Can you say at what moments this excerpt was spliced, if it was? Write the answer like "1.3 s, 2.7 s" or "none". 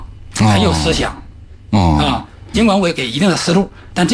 2.5 s